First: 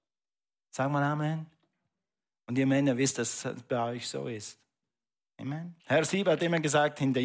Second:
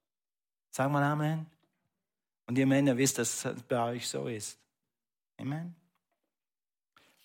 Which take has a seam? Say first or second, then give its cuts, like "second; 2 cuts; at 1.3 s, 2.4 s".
first; 1 cut; at 5.8 s